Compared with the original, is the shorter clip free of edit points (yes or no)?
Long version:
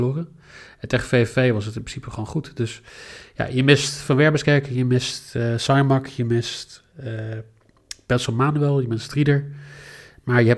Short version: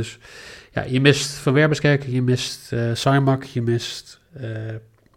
yes